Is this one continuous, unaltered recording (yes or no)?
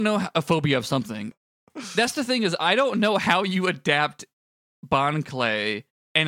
no